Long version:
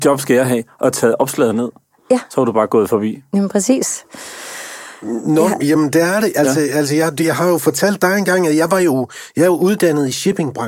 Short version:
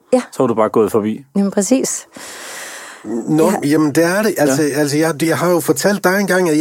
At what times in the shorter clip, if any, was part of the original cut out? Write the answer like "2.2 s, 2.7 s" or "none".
none